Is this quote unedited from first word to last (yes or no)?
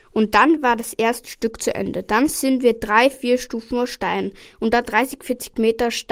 yes